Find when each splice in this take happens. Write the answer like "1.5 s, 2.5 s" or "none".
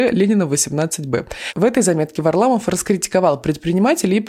none